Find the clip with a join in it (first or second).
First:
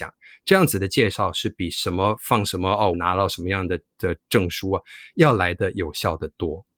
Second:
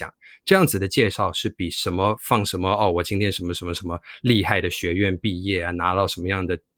first